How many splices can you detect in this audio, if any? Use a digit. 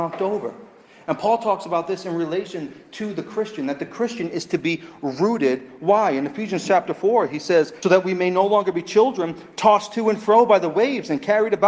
1